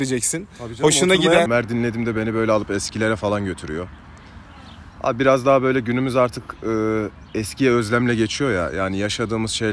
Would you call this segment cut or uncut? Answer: cut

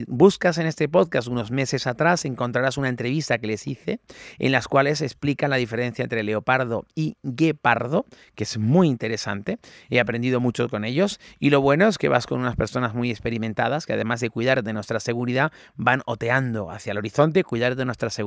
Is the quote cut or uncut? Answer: uncut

